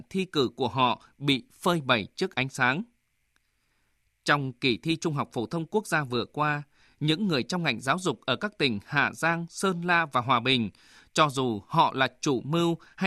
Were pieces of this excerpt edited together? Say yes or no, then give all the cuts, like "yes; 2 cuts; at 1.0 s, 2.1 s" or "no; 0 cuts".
no; 0 cuts